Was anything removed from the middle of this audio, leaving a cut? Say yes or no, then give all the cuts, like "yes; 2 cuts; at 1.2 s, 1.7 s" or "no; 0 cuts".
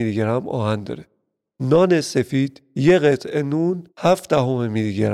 yes; 2 cuts; at 1.4 s, 3.9 s